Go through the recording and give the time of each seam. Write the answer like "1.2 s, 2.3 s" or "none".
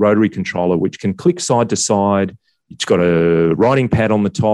none